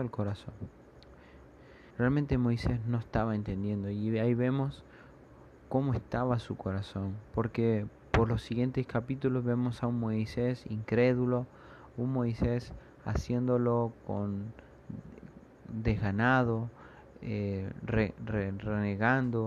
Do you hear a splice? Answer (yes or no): yes